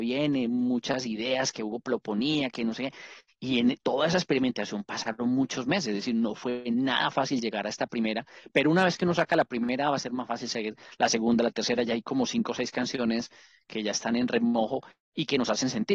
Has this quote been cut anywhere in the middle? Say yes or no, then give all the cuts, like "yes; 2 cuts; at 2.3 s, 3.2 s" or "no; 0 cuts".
no; 0 cuts